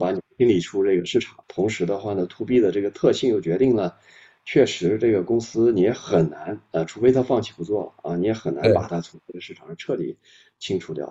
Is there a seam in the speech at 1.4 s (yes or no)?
yes